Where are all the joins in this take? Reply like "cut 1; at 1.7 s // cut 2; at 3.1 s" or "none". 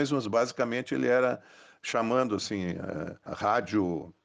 cut 1; at 3.3 s